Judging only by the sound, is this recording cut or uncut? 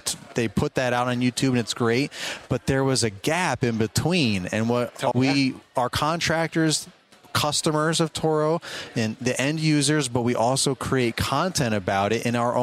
cut